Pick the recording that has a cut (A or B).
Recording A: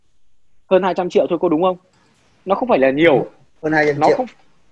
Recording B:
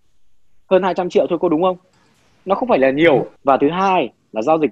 B